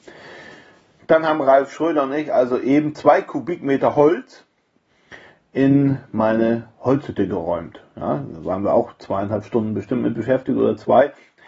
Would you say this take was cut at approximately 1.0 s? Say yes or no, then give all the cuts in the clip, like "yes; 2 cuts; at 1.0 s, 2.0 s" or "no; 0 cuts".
yes; 1 cut; at 1.0 s